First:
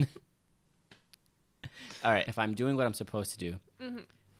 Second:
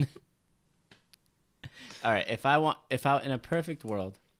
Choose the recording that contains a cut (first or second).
first